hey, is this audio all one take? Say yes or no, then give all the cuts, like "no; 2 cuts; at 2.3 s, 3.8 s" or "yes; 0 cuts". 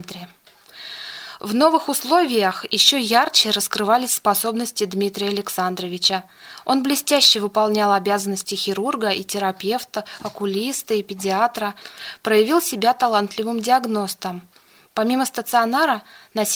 yes; 0 cuts